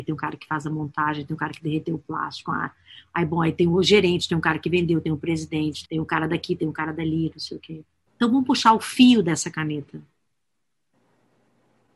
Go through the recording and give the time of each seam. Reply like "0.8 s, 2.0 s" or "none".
5.8 s, 8.1 s